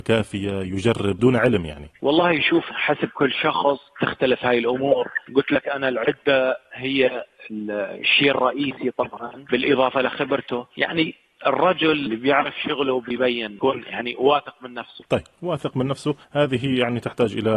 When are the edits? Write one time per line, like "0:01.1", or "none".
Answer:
0:16.2